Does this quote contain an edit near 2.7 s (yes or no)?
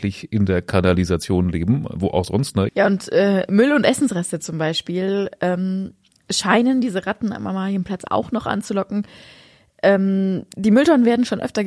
yes